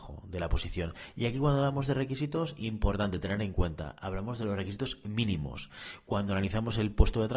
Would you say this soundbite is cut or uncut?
uncut